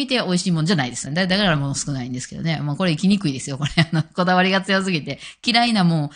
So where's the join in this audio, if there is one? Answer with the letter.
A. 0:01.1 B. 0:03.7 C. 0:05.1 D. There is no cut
A